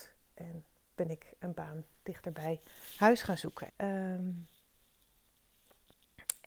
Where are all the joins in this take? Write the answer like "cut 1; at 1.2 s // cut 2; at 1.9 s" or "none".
cut 1; at 3.7 s